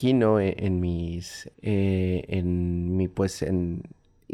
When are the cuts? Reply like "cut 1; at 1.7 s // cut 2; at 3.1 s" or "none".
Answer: cut 1; at 1.5 s